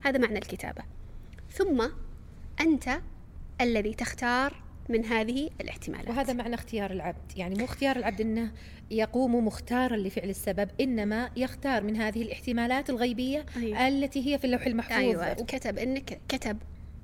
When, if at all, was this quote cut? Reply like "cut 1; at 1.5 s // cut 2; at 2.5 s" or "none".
cut 1; at 15.4 s